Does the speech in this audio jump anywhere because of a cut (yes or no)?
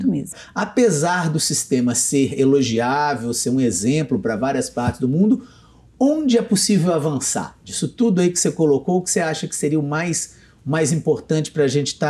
no